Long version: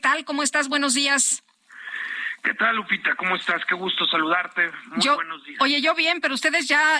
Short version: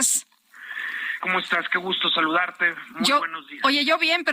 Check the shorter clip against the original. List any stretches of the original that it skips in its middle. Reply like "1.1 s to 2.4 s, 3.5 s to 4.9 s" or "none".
2.4 s to 3.2 s